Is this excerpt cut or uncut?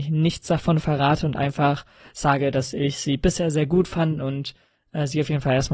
uncut